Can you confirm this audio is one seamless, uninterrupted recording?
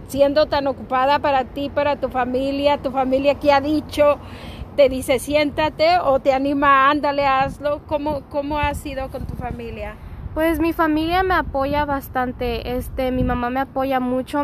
no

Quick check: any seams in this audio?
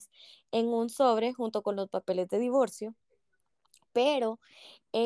no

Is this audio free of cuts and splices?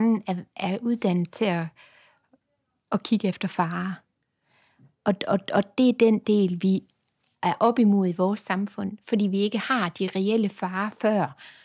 yes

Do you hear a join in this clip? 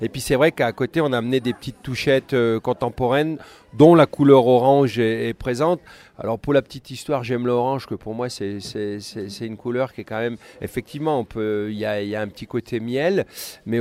no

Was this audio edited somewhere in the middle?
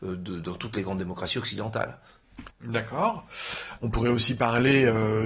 yes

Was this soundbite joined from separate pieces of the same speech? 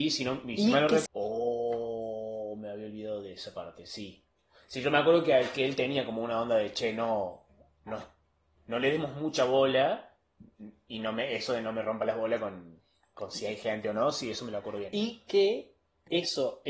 yes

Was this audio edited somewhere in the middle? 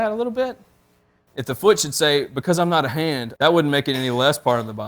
yes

